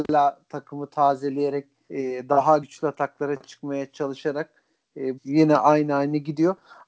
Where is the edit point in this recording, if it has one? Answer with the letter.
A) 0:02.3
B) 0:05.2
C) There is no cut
B